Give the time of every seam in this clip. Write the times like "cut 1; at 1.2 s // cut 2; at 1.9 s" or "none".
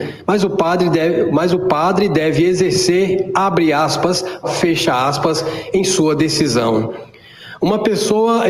cut 1; at 4.4 s